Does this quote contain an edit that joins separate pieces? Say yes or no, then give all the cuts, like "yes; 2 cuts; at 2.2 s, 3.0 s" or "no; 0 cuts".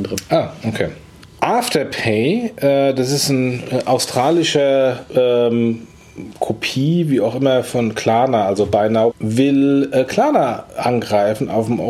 yes; 2 cuts; at 1.2 s, 9.1 s